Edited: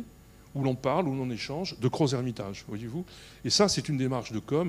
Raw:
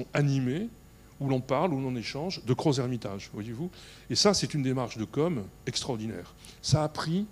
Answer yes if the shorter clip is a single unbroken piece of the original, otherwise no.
yes